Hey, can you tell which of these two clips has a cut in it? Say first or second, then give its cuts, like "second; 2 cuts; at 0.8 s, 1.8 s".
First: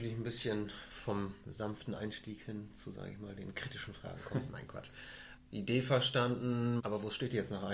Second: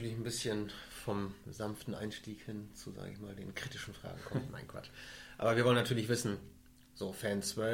first; 2 cuts; at 5.4 s, 6.8 s